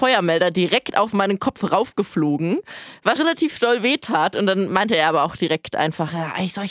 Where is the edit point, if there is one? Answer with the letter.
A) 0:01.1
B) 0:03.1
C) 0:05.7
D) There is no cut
B